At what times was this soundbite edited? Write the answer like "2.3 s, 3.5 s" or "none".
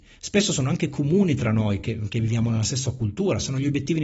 none